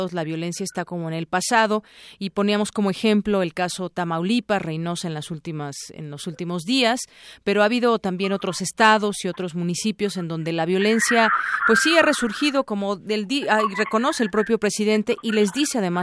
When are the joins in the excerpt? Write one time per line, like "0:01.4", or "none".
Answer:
none

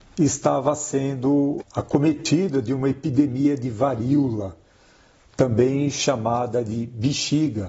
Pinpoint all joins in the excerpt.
0:01.6

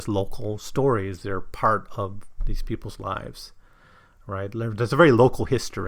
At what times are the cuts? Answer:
none

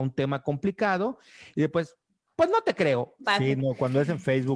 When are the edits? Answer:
0:03.2

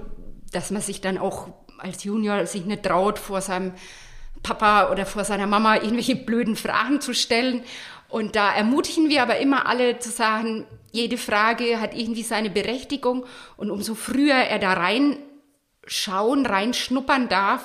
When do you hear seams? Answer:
0:10.9
0:13.5

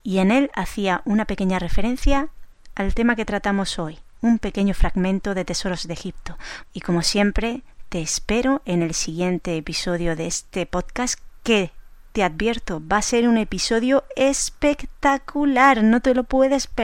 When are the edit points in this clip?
0:06.6

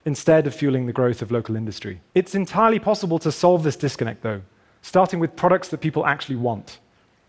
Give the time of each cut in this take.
0:02.1

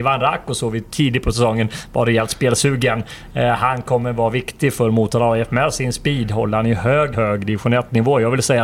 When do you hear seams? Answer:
0:07.1

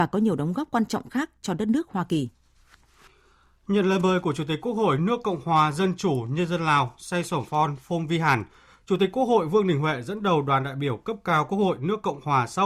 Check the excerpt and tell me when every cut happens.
none

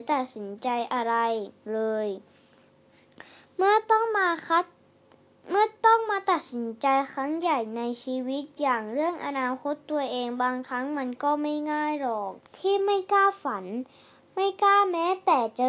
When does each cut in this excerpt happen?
0:12.5

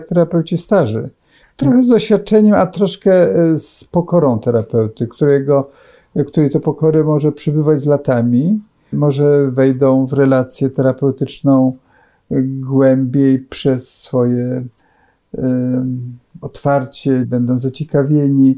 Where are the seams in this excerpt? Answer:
0:01.4
0:08.9
0:17.2

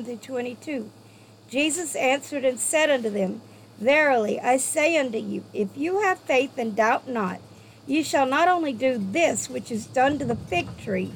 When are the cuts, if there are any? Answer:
none

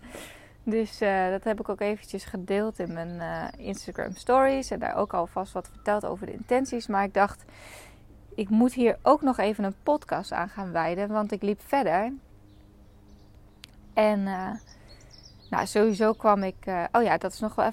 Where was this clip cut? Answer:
none

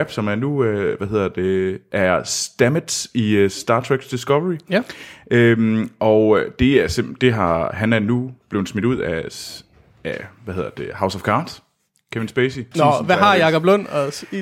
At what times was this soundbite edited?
0:12.7

